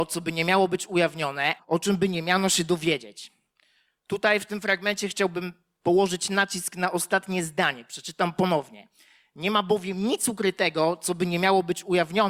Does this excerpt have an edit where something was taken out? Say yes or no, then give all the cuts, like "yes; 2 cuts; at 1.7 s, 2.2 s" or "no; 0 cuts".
yes; 1 cut; at 1.6 s